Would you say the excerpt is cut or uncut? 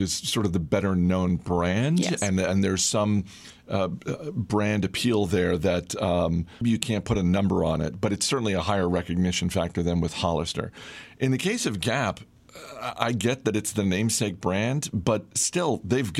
cut